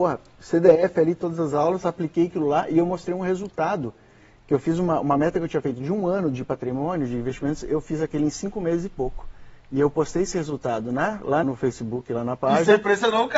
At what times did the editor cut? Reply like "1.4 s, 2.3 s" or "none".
11.4 s